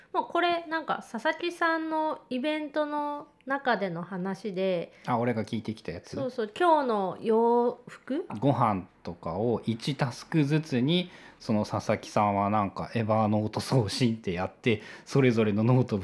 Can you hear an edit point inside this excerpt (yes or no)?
yes